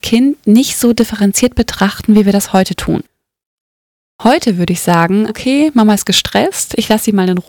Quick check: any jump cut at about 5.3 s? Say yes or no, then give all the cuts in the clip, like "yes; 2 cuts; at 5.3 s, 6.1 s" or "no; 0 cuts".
yes; 1 cut; at 5.3 s